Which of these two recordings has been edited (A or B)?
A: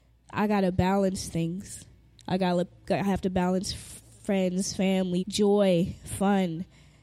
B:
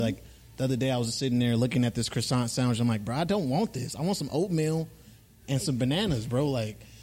A